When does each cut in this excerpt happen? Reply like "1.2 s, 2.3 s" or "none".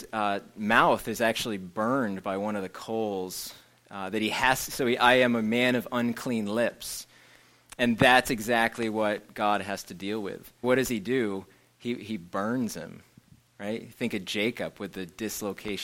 10.6 s